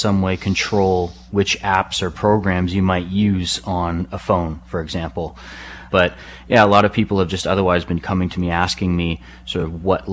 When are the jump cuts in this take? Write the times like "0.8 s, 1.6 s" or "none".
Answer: 5.9 s